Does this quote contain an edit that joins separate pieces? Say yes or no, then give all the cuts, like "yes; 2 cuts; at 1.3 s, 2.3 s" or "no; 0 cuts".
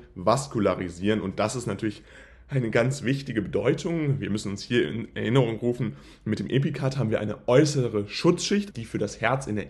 yes; 1 cut; at 8.7 s